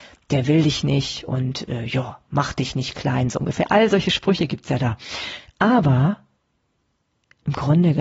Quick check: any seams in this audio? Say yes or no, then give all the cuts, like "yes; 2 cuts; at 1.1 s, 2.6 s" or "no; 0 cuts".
no; 0 cuts